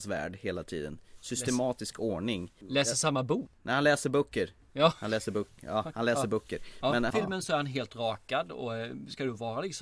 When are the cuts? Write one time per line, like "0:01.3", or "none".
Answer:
0:07.1